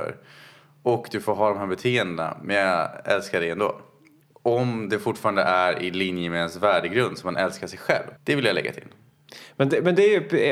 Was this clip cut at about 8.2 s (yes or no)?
yes